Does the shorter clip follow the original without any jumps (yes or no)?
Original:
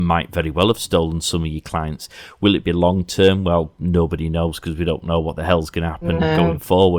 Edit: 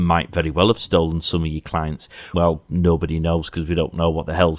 no